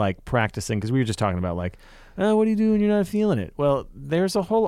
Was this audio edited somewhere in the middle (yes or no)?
no